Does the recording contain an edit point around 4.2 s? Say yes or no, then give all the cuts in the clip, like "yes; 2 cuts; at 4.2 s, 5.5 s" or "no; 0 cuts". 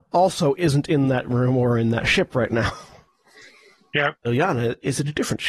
yes; 1 cut; at 4.2 s